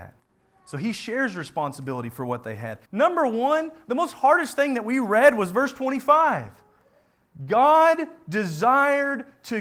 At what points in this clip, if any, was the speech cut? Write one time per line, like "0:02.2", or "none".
0:02.8